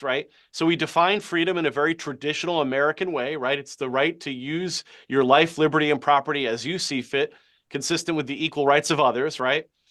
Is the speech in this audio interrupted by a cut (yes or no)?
no